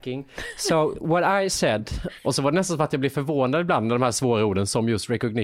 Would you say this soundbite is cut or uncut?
cut